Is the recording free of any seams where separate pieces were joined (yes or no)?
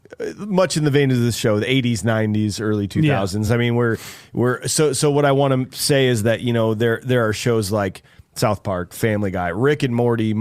yes